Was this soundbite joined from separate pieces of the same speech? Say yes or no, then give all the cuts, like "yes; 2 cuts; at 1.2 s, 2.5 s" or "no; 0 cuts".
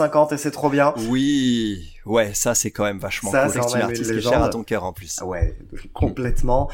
yes; 1 cut; at 3.5 s